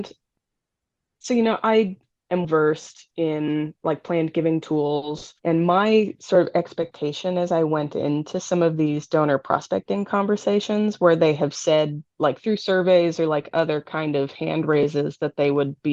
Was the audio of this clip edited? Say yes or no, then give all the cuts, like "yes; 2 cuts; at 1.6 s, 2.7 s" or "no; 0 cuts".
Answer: yes; 2 cuts; at 2.4 s, 5.4 s